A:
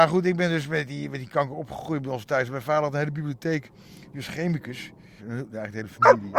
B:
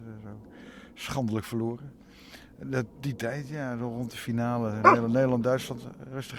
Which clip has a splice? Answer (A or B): A